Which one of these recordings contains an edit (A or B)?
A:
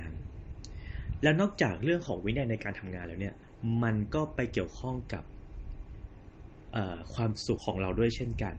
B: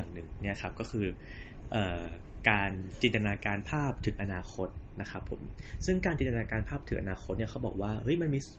A